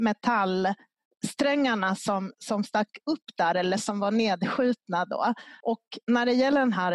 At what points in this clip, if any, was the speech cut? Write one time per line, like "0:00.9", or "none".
0:05.6